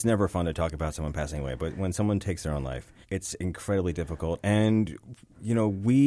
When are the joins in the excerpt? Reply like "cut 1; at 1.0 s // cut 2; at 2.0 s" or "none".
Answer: cut 1; at 3.0 s